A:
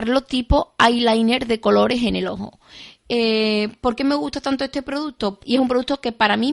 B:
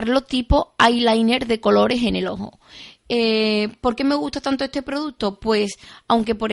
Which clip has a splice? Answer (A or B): A